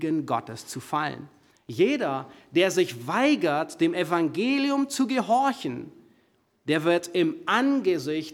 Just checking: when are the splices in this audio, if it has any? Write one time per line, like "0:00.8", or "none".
0:01.5